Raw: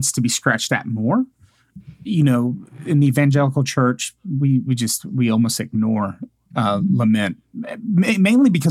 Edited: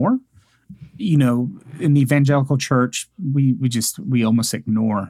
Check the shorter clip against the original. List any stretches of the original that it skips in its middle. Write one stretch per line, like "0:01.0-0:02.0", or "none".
none